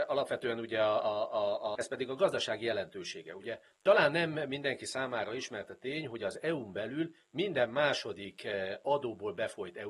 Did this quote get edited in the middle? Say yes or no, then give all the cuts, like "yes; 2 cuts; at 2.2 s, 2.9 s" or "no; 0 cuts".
yes; 1 cut; at 1.7 s